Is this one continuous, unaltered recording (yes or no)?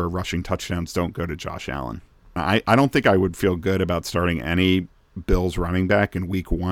no